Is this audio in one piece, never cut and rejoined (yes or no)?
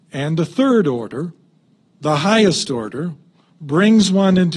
no